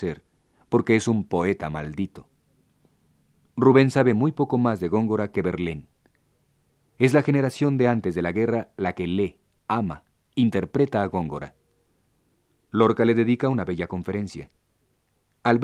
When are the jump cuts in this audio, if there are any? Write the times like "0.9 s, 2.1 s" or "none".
none